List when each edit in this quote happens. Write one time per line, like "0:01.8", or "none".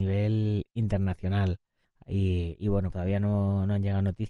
0:01.8
0:02.9